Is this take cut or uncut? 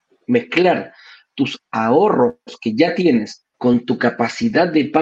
cut